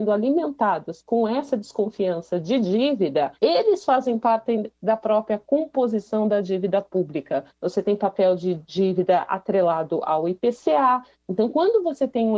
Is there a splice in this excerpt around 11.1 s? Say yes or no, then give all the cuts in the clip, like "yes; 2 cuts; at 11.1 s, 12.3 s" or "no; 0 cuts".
no; 2 cuts; at 3.4 s, 7.5 s